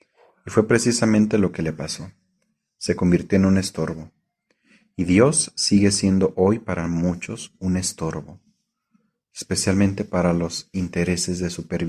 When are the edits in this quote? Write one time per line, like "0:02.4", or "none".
none